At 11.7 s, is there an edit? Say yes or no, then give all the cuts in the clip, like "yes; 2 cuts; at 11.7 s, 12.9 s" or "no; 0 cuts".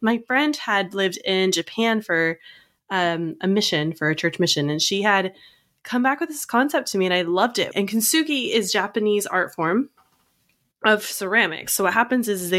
no; 1 cut; at 7.7 s